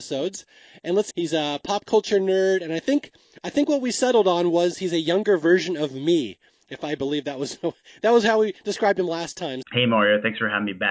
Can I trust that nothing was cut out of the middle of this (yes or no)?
no